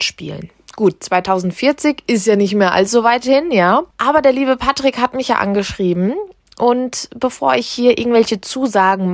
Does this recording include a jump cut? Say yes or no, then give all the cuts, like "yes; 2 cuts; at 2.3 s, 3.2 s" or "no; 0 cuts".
no; 0 cuts